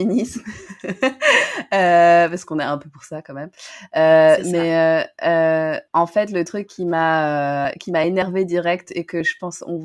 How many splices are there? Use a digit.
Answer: 1